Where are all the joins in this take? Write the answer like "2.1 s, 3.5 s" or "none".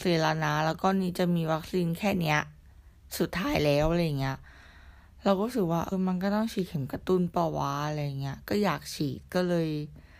5.9 s